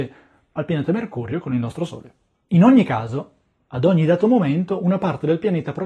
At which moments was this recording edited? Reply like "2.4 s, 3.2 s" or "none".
none

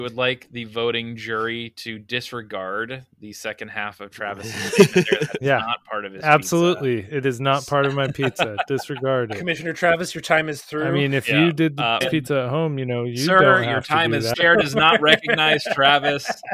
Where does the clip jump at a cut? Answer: 12.0 s, 14.3 s

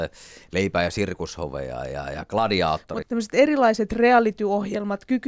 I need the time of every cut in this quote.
3.0 s

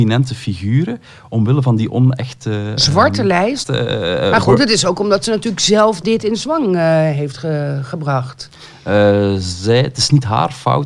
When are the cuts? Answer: 3.6 s

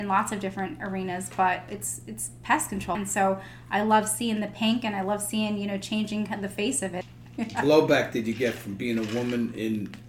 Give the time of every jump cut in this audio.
2.9 s, 7.0 s

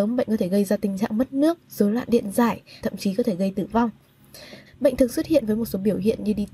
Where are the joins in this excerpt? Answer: 2.8 s, 4.7 s

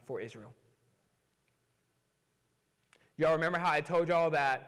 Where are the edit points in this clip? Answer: none

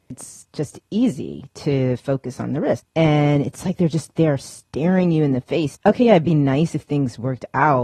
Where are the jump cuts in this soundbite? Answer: 2.8 s, 5.7 s

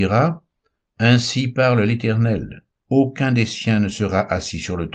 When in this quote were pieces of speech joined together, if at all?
2.8 s

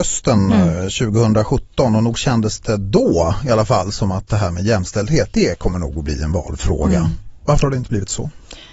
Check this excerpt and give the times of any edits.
none

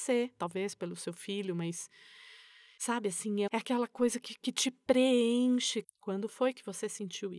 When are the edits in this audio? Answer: 3.5 s, 5.8 s

